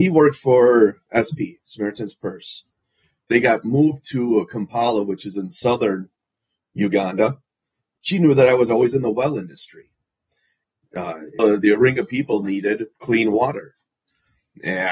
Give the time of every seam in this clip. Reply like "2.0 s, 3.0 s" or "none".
11.4 s, 12.9 s